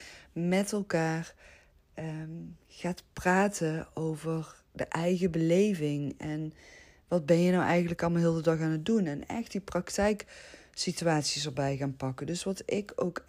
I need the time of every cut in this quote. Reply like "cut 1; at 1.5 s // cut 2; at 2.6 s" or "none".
none

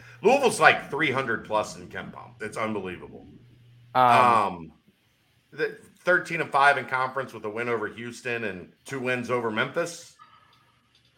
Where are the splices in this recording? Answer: cut 1; at 2.4 s // cut 2; at 5.5 s // cut 3; at 8.8 s

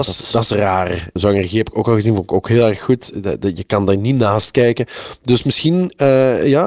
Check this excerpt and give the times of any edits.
cut 1; at 1.2 s

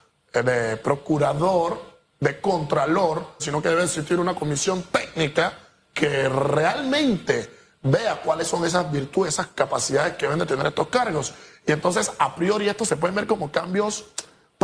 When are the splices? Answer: cut 1; at 3.4 s

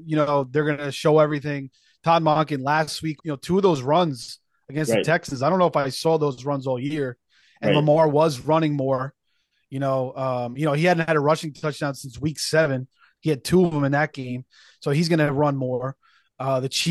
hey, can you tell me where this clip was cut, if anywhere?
cut 1; at 3.2 s

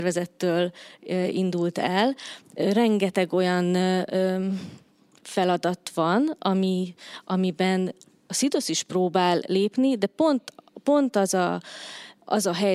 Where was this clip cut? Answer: cut 1; at 2.4 s

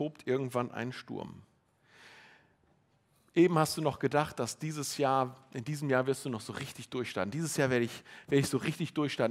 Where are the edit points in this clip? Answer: none

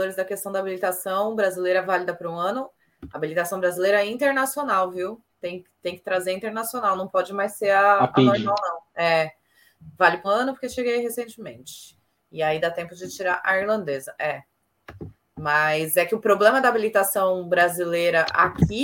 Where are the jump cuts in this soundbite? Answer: cut 1; at 10.2 s

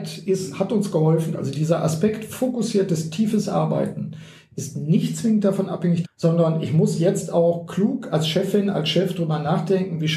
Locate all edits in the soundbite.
cut 1; at 1.3 s // cut 2; at 6.0 s

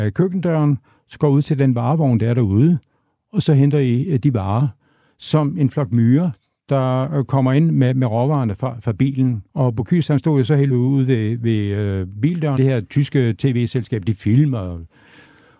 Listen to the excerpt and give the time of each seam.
cut 1; at 9.5 s // cut 2; at 10.7 s // cut 3; at 12.6 s

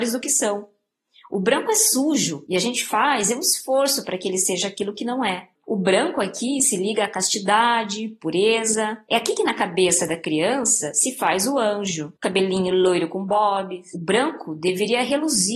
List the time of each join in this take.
cut 1; at 5.6 s // cut 2; at 12.2 s

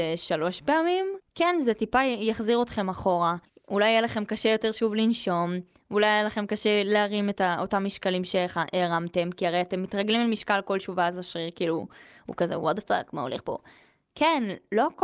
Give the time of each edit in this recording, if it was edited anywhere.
cut 1; at 1.3 s

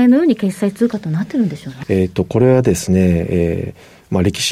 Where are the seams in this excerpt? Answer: cut 1; at 1.8 s

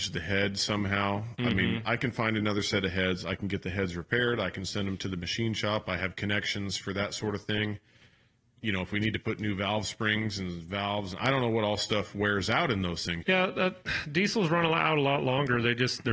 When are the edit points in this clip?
cut 1; at 13.2 s

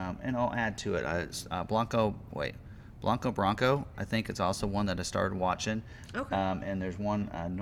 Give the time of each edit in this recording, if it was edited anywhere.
cut 1; at 2.3 s

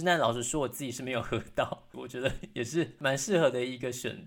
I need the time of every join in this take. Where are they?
cut 1; at 1.9 s

